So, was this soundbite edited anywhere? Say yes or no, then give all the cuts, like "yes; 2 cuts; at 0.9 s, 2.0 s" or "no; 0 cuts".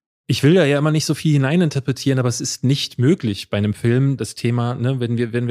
yes; 1 cut; at 4.2 s